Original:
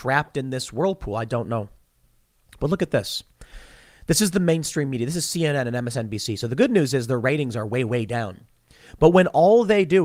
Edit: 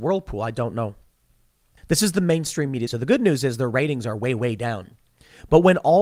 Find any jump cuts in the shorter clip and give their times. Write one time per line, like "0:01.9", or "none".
0:01.8
0:02.9